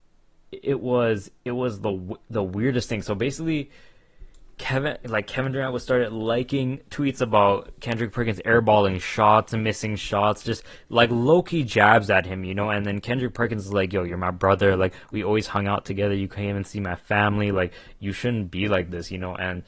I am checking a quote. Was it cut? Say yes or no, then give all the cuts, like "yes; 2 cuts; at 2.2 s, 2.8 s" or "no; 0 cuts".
no; 0 cuts